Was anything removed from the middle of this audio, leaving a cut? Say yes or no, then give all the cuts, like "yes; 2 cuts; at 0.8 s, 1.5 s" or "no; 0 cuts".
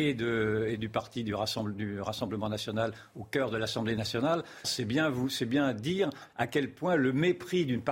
yes; 1 cut; at 4.6 s